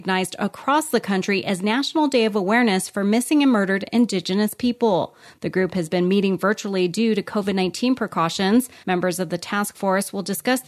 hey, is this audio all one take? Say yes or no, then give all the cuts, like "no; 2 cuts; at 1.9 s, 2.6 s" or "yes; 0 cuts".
no; 1 cut; at 8.8 s